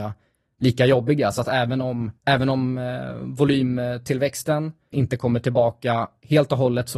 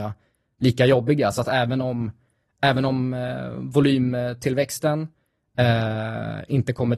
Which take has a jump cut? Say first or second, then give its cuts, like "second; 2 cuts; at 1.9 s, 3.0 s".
first; 2 cuts; at 2.2 s, 4.9 s